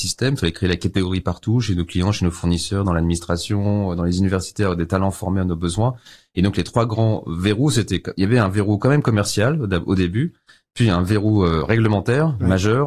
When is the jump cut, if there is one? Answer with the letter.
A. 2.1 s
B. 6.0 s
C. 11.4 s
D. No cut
D